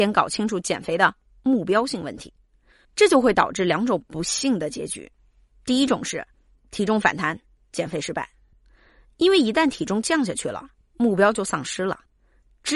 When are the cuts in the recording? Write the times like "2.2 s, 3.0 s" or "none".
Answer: 2.8 s